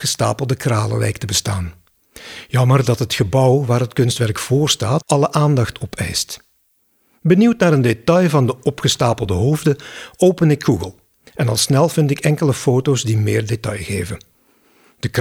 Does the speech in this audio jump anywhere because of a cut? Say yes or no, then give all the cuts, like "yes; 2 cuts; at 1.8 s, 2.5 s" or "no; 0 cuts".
yes; 1 cut; at 5.0 s